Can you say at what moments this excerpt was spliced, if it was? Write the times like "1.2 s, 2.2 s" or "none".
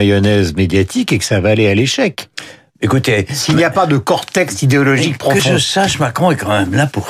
none